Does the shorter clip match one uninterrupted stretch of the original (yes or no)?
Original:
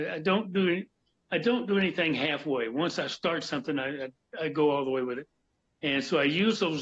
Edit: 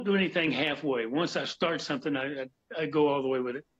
yes